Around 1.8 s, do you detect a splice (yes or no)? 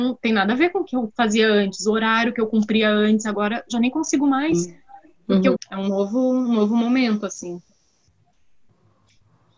no